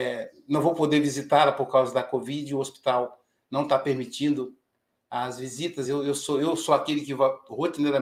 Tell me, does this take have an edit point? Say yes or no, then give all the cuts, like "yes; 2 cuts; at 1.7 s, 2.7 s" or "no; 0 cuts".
no; 0 cuts